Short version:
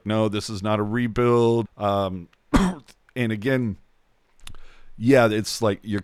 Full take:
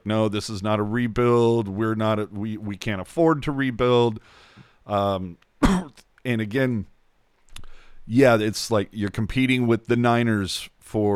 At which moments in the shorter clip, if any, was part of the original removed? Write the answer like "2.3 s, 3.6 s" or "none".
1.6 s